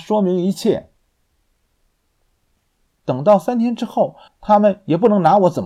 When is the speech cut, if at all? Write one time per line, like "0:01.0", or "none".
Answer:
0:02.9
0:04.3